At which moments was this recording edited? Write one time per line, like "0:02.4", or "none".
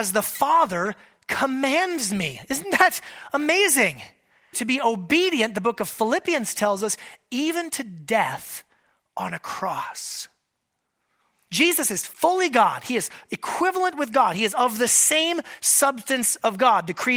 0:04.5
0:11.5